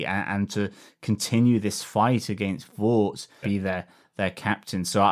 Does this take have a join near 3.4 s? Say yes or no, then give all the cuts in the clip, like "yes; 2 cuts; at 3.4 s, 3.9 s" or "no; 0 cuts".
yes; 1 cut; at 3.4 s